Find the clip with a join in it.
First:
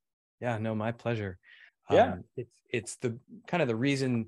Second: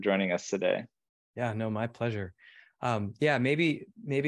first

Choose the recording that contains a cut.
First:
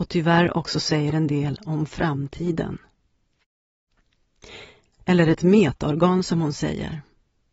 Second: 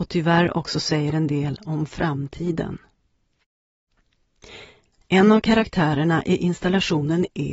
first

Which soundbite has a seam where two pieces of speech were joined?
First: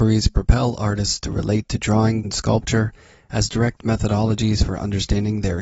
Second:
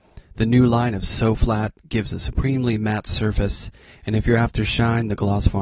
first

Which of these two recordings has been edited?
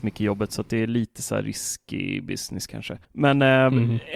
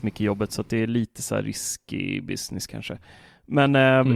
first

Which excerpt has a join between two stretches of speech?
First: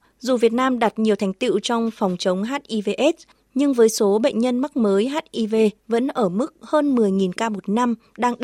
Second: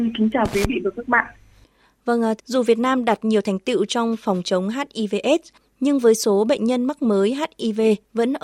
second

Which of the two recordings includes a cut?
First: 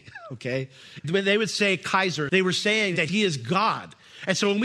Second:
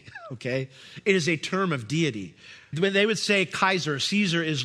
first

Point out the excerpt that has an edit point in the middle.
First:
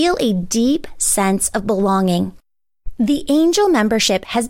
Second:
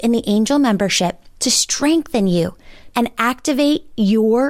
second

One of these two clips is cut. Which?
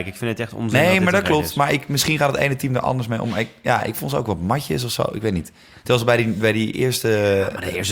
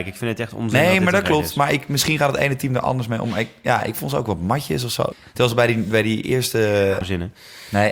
second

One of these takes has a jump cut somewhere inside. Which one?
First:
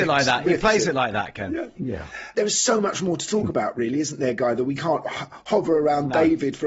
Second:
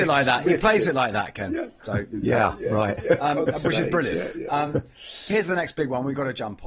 first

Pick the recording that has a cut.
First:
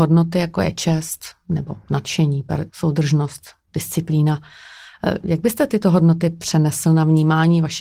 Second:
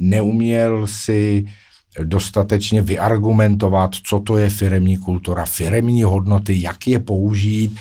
first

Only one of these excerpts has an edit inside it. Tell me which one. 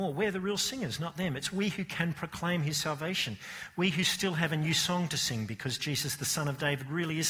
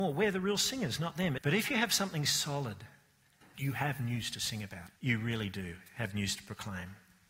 second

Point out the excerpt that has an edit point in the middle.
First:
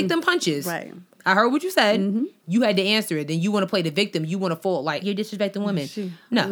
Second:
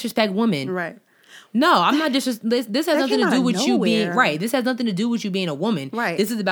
first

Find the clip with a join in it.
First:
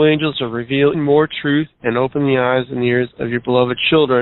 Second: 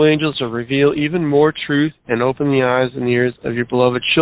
first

